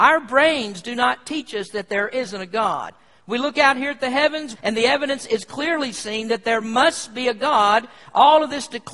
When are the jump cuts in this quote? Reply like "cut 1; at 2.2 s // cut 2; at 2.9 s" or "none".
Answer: cut 1; at 4.5 s